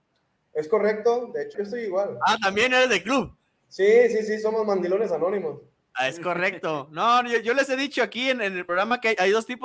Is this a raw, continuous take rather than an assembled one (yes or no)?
no